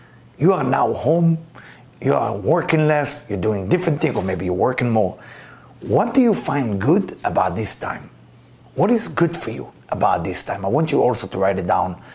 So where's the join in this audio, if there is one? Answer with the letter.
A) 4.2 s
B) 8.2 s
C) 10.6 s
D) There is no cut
D